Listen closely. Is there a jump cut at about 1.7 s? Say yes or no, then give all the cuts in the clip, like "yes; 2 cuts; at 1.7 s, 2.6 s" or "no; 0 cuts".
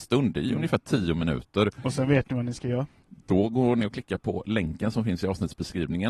no; 0 cuts